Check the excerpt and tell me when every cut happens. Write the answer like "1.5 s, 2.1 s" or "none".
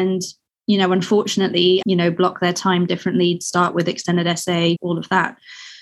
1.8 s, 4.8 s